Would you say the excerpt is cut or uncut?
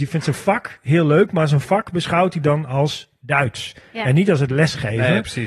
uncut